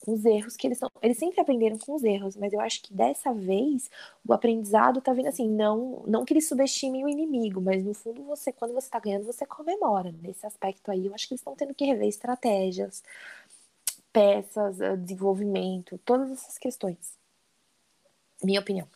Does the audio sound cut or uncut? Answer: uncut